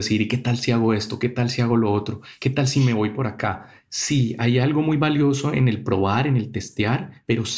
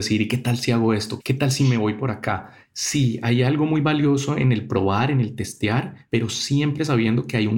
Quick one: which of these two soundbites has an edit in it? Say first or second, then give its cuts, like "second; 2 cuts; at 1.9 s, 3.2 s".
second; 1 cut; at 1.2 s